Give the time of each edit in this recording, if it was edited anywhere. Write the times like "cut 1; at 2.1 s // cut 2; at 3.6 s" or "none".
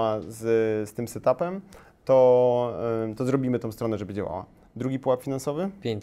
none